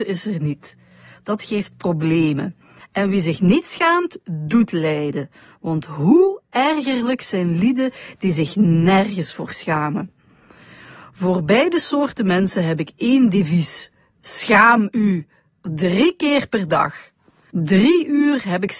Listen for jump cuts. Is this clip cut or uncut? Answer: cut